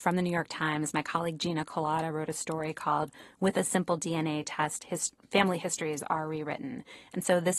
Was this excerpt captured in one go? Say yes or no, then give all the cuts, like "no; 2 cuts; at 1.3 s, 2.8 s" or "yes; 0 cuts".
yes; 0 cuts